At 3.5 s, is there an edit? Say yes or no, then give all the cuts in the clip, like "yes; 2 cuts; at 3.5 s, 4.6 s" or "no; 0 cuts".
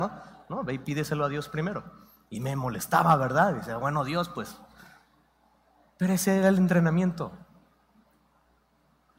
no; 0 cuts